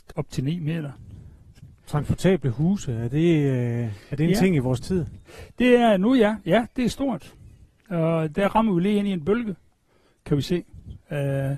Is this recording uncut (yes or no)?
yes